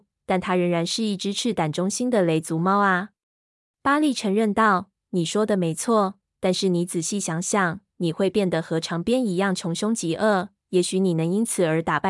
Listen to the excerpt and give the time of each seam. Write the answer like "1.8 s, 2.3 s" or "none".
3.6 s, 7.9 s

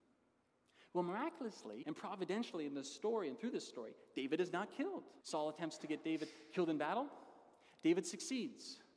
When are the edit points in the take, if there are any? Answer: 1.8 s, 5.2 s

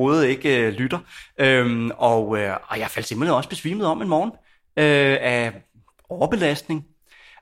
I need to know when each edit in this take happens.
none

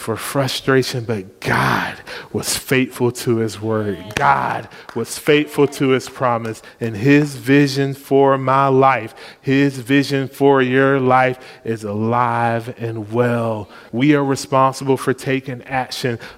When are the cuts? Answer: 13.9 s

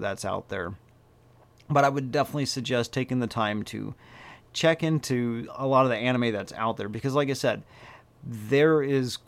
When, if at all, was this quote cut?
none

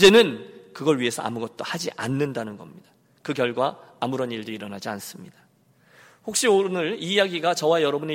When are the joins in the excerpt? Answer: none

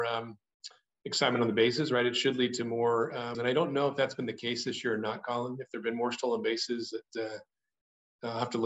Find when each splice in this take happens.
3.3 s

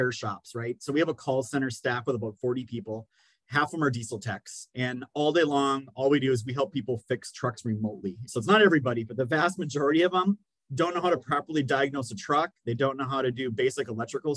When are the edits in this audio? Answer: 8.3 s

